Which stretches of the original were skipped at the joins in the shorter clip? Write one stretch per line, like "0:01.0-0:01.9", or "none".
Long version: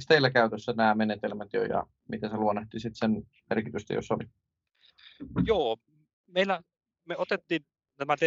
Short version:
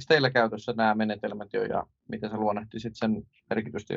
none